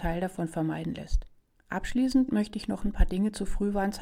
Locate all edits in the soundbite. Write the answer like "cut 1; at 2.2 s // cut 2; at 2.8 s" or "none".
cut 1; at 1.5 s